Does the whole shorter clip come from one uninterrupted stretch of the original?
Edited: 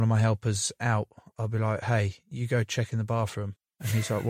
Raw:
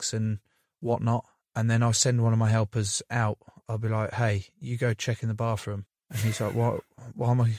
yes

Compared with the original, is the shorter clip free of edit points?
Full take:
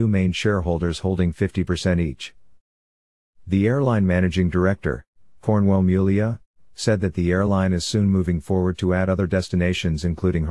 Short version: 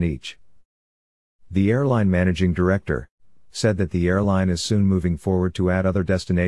no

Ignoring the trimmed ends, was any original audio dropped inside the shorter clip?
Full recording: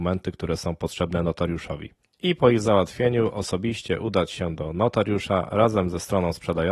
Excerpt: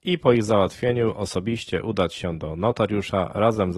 no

